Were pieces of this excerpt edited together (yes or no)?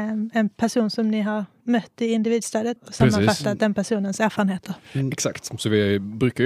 yes